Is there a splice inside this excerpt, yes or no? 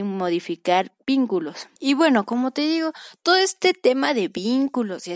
yes